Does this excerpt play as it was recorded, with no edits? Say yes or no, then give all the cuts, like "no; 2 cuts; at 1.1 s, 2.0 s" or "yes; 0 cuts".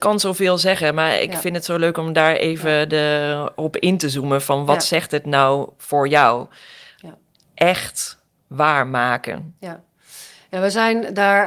yes; 0 cuts